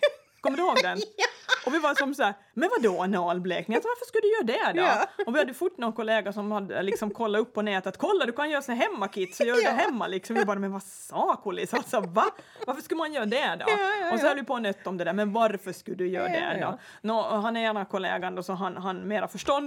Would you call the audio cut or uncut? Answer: uncut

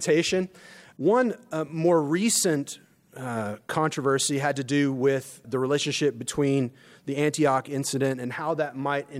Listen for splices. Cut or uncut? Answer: cut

